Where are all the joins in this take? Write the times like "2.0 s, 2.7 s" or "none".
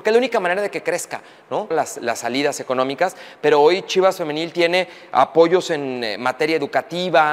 1.7 s